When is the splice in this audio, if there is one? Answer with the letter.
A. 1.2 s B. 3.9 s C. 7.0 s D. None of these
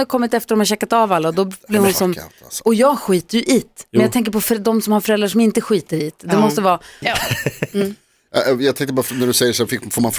C